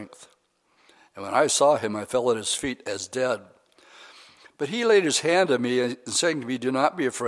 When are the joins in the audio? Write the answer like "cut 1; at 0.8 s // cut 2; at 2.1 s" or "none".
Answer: none